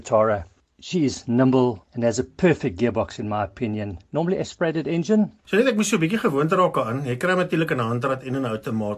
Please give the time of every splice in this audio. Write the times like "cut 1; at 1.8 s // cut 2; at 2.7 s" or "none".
cut 1; at 5.4 s